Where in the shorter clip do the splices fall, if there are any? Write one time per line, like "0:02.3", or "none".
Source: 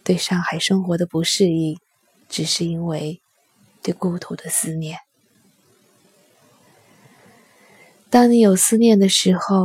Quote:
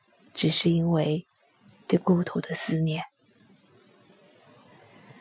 none